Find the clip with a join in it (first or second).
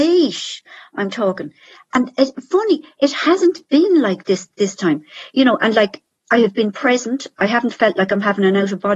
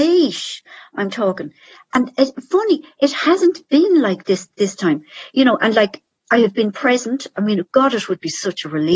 second